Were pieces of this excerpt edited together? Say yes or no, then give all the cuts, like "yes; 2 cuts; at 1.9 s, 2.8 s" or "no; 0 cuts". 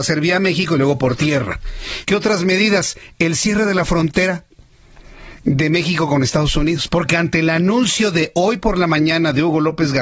yes; 2 cuts; at 2.0 s, 6.9 s